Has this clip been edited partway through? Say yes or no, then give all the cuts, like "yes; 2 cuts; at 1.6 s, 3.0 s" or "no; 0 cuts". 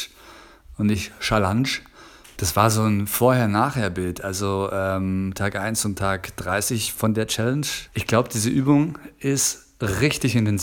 yes; 2 cuts; at 2.4 s, 7.9 s